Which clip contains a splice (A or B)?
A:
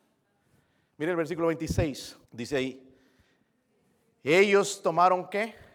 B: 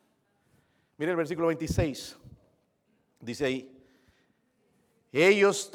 A